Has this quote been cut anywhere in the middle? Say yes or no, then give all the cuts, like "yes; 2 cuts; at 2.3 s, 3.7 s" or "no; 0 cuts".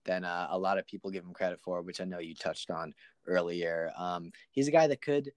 no; 0 cuts